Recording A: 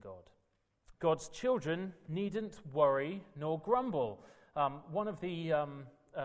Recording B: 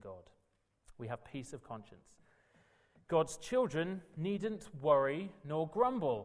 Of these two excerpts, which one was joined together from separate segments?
A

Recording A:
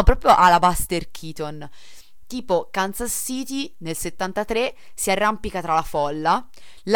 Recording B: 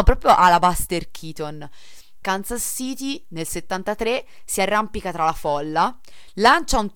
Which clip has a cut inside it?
B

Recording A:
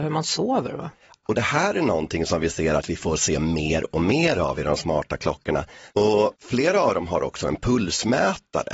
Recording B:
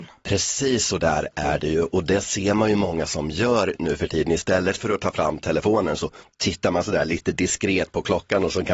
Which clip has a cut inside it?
A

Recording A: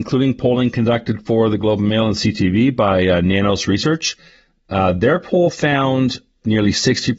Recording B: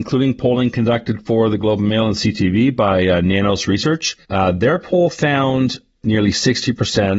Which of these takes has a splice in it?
B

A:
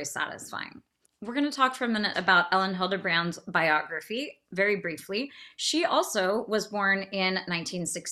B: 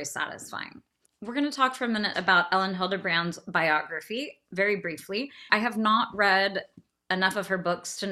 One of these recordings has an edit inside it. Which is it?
B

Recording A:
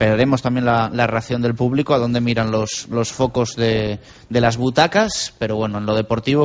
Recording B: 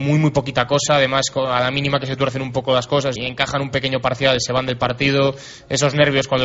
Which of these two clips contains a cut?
B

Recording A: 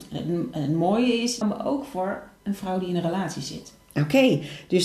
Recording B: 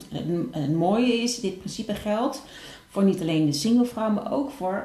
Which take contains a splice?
A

